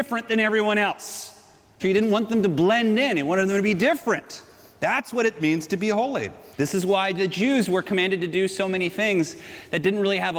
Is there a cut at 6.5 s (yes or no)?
yes